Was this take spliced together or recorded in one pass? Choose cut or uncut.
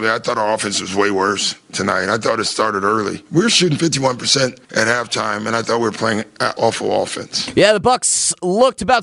cut